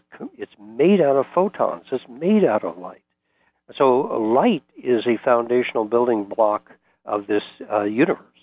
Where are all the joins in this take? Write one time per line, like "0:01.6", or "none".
0:03.5
0:07.0